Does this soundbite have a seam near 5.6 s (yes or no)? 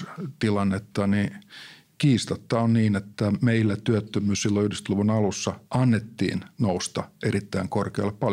yes